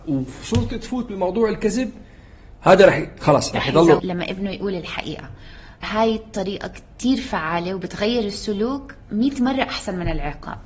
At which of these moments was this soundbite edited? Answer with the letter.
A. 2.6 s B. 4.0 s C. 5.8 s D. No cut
B